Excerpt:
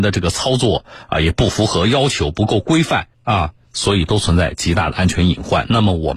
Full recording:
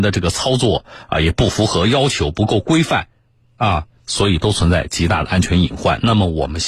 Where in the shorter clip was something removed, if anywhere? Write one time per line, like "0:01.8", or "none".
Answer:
0:03.1